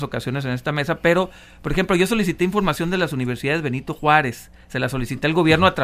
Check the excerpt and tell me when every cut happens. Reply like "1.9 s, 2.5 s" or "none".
none